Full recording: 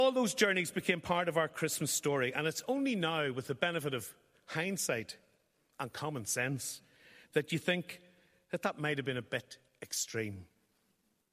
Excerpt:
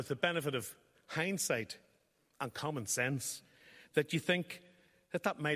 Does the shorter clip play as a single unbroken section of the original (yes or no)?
yes